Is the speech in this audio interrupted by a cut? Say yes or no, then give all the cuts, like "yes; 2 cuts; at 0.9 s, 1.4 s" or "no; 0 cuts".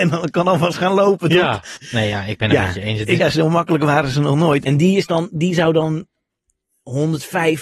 yes; 3 cuts; at 1.7 s, 3.2 s, 4.6 s